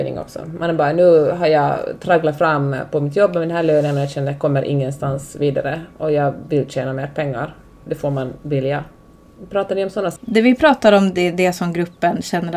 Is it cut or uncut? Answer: cut